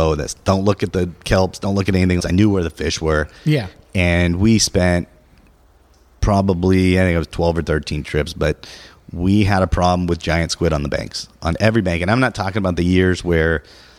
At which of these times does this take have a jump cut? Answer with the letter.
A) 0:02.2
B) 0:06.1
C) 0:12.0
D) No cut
A